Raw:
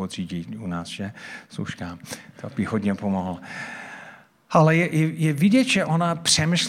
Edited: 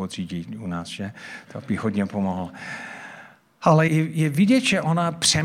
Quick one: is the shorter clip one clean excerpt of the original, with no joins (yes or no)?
no